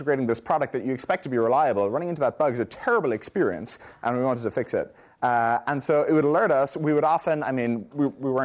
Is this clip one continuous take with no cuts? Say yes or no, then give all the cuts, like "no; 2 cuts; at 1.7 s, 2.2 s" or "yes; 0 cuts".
yes; 0 cuts